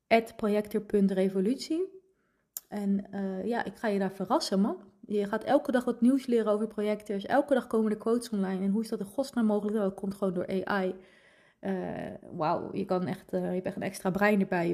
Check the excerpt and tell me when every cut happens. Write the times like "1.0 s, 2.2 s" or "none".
none